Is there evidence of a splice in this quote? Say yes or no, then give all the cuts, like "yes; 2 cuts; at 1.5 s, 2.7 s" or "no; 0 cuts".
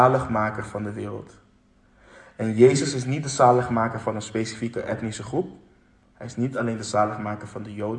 no; 0 cuts